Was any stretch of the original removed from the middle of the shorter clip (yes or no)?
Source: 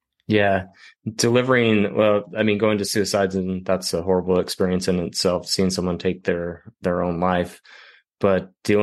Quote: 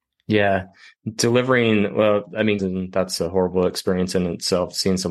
yes